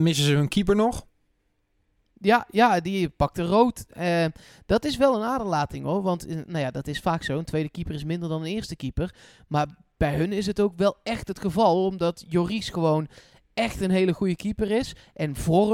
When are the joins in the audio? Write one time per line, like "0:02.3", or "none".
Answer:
none